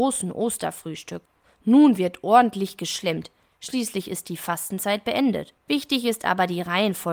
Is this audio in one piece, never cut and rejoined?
no; 1 cut; at 5.6 s

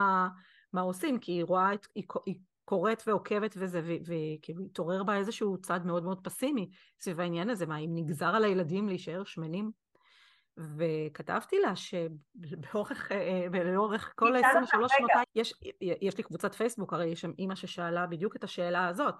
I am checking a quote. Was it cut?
yes; 1 cut; at 15.2 s

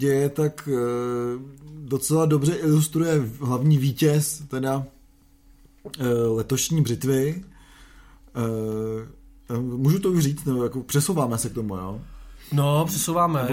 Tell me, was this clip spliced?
no; 0 cuts

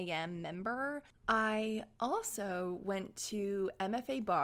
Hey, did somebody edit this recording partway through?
yes; 1 cut; at 1.1 s

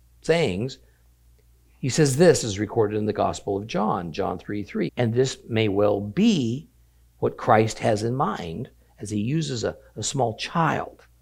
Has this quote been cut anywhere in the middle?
yes; 1 cut; at 4.9 s

